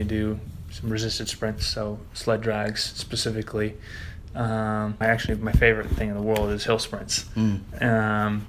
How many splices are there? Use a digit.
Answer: 1